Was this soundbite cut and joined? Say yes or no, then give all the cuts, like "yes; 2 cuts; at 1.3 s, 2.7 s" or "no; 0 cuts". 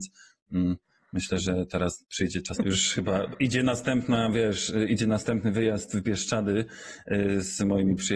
yes; 1 cut; at 2.5 s